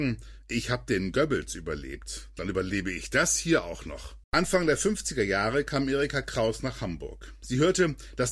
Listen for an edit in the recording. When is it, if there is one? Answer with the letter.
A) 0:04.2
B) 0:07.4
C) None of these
A